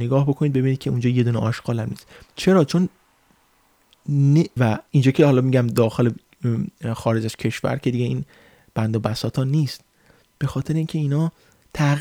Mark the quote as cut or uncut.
cut